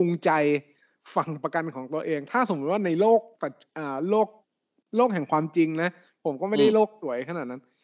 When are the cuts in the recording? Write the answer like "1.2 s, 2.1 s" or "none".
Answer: none